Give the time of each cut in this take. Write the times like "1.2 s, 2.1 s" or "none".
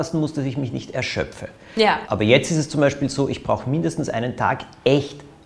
2.1 s